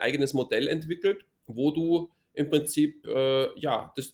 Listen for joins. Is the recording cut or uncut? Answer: cut